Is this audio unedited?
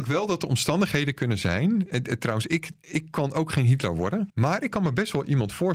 no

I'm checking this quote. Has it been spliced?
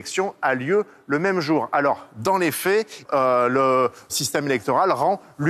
yes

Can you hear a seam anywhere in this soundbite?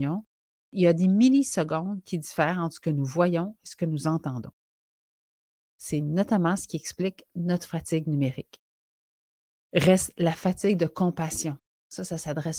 yes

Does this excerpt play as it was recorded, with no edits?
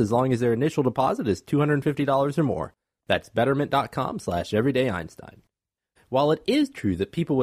no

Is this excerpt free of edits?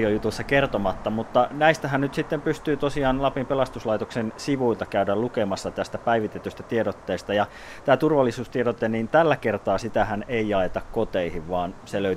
yes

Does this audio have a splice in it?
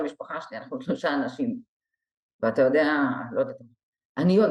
yes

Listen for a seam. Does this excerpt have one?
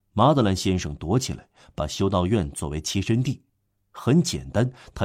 no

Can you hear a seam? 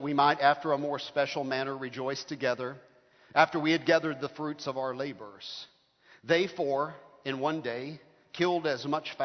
no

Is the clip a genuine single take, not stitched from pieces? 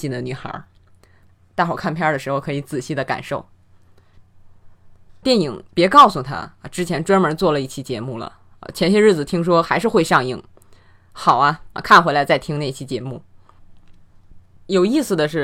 no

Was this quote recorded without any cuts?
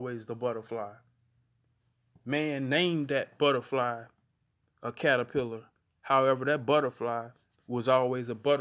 yes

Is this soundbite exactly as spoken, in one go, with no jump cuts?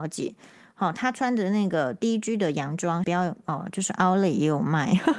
no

